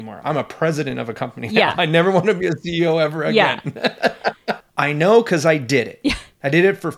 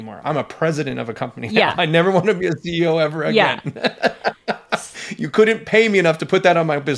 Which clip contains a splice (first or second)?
first